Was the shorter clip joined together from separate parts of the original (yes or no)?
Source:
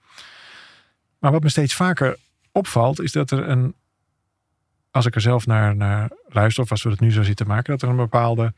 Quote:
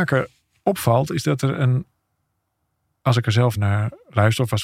yes